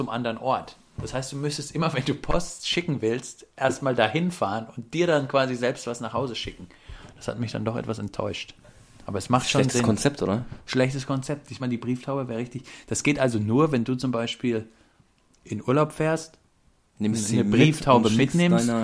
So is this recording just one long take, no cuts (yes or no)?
no